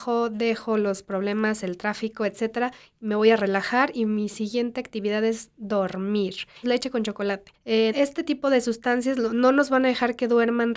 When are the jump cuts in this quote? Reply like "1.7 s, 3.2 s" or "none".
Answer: 6.6 s, 7.9 s